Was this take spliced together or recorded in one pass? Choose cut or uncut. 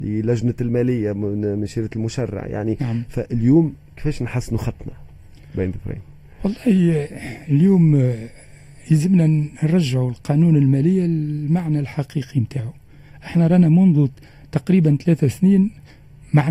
uncut